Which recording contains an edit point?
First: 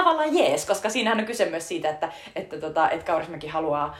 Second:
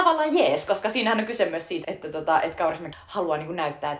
second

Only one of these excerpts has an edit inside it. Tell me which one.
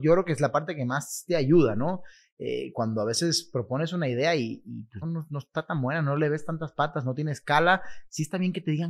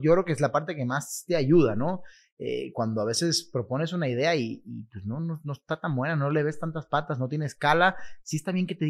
first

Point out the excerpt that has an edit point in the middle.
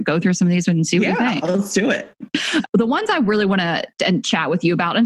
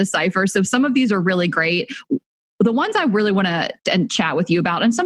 first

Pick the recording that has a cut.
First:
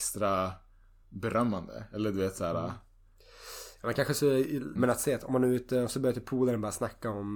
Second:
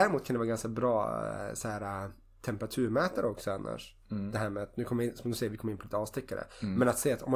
first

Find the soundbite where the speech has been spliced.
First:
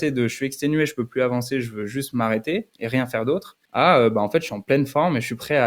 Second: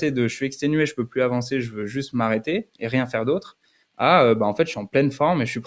first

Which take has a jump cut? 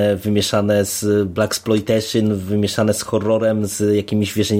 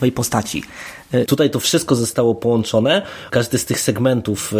second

